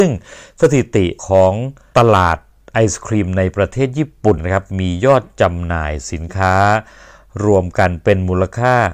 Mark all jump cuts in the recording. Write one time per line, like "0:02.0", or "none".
0:04.4